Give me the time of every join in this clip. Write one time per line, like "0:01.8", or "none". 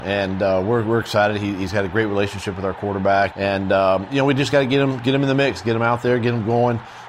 0:03.3